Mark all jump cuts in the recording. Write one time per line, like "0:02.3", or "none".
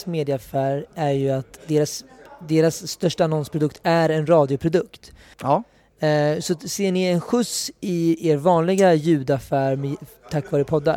0:05.3

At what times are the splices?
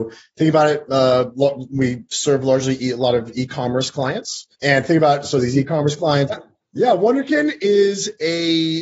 0:04.5
0:06.3

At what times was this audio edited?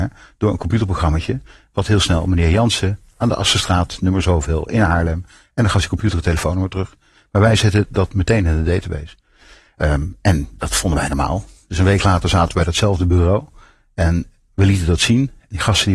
none

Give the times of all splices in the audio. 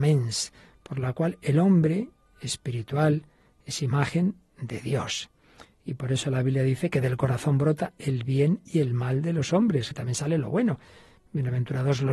0:09.9

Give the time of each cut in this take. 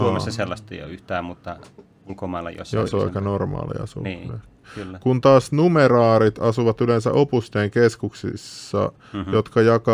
0:02.8

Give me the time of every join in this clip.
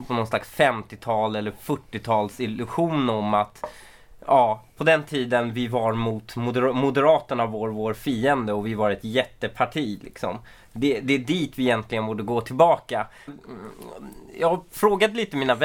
0:13.3

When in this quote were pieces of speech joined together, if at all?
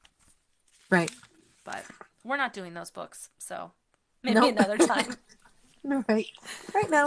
none

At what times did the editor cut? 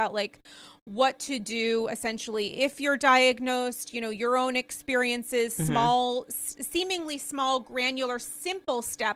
none

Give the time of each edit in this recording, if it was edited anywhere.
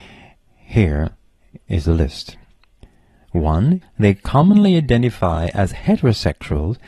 0:03.8

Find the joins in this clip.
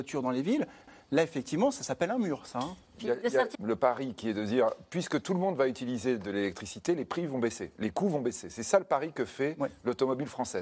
0:03.5

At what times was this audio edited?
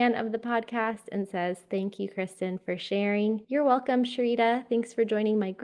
0:03.4

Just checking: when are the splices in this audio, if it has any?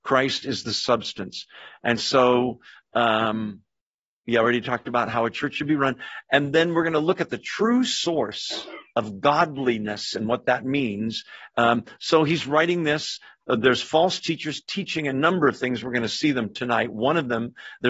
0:11.5

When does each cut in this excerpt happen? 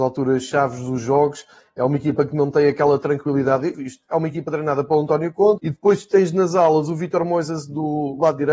0:03.7
0:05.6

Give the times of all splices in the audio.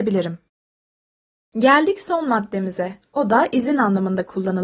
none

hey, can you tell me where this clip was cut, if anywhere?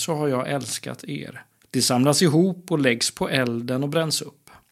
0:01.6

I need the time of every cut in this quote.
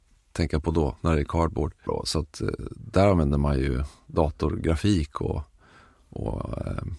0:01.9

